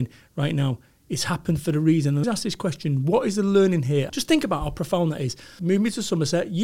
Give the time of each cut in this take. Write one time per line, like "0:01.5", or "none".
0:02.2
0:04.1
0:05.6